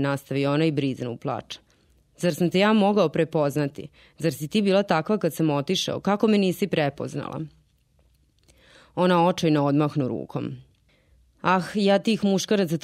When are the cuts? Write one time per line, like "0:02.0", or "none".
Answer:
none